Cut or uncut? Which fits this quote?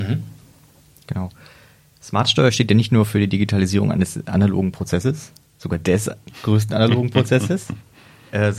uncut